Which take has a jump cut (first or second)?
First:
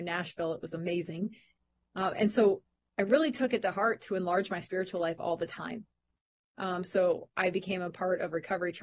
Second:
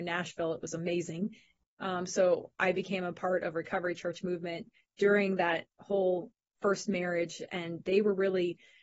second